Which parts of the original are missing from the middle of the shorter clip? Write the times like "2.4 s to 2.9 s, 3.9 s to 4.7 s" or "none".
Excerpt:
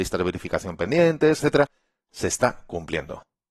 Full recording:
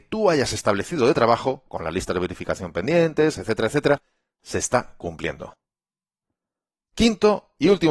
3.3 s to 3.7 s

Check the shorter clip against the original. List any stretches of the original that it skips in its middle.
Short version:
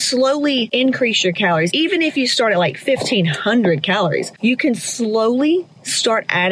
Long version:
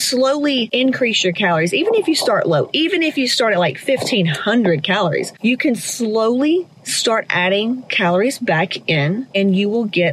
1.7 s to 2.7 s

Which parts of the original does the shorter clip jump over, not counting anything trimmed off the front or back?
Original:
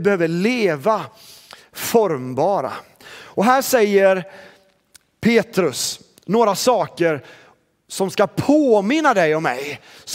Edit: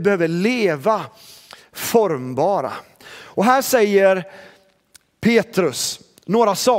none

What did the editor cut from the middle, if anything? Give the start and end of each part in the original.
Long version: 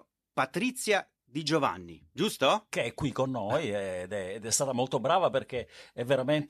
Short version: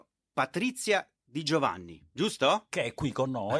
none

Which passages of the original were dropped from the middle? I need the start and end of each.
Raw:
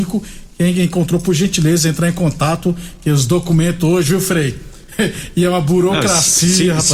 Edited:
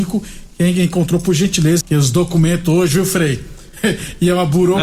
1.8 s to 3.0 s

